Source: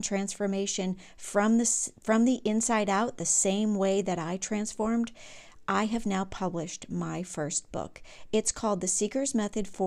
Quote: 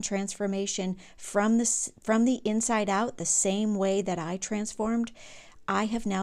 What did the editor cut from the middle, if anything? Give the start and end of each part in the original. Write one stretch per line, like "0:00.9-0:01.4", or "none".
none